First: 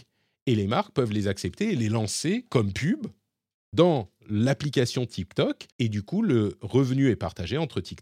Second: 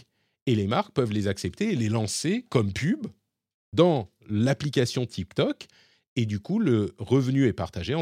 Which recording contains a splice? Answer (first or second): first